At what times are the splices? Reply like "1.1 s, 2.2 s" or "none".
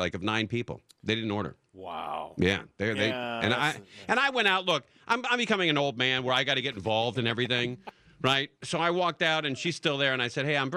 none